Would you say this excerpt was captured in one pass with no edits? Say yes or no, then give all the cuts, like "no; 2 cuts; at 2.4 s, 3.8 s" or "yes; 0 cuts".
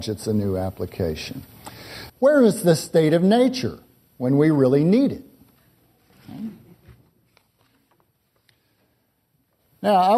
no; 1 cut; at 2.1 s